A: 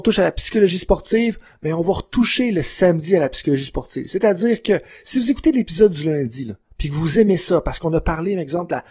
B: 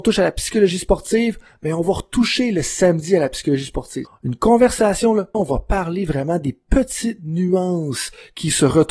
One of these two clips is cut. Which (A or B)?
B